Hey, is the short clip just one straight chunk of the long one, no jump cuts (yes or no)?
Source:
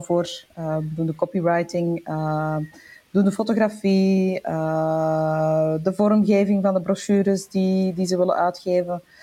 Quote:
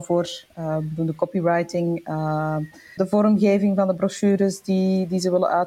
no